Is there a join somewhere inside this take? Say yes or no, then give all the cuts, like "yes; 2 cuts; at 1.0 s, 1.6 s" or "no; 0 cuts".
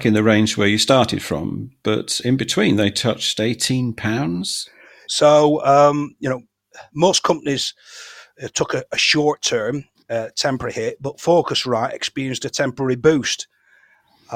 yes; 1 cut; at 5.1 s